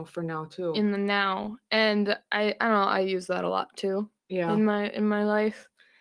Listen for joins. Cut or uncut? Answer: cut